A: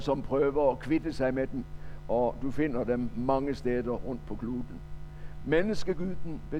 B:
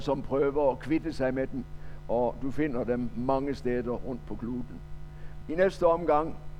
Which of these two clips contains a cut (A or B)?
B